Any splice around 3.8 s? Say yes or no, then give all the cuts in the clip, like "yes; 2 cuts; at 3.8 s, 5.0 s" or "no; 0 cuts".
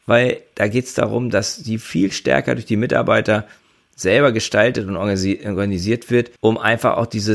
no; 1 cut; at 6.4 s